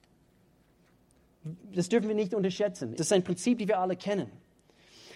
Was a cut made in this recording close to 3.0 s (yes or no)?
yes